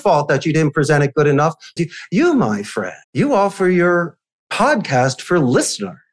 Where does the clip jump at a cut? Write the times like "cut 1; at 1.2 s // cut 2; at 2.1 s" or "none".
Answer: cut 1; at 1.8 s // cut 2; at 3.0 s